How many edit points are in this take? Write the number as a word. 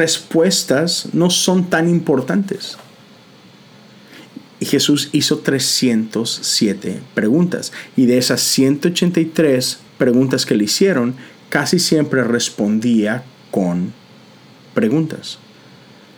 one